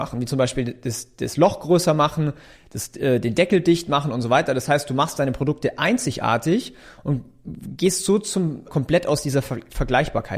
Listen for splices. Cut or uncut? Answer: cut